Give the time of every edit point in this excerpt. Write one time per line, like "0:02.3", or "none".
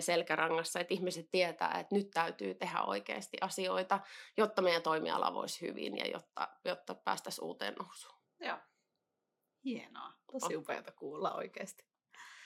none